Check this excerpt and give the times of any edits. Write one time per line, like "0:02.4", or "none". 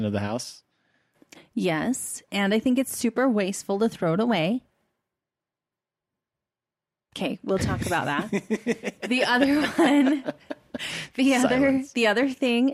0:02.3